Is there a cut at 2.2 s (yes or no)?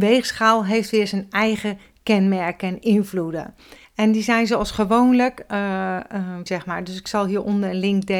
no